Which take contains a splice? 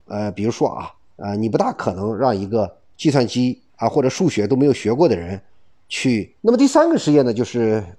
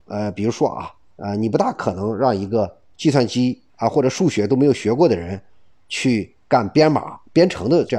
first; 1 cut; at 6.4 s

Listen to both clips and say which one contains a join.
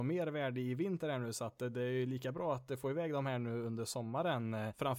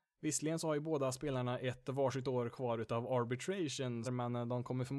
second; 1 cut; at 4.0 s

